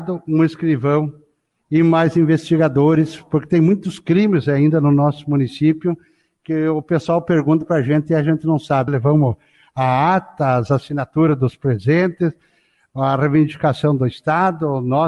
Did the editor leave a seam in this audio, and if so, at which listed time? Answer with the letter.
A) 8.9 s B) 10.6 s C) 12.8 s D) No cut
A